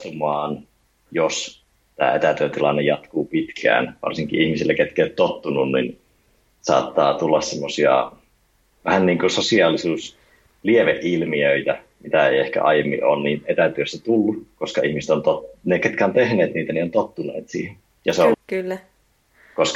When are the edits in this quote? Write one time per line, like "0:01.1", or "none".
0:18.3